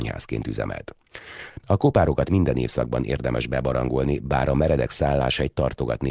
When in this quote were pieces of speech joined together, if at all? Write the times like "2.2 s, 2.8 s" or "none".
1.6 s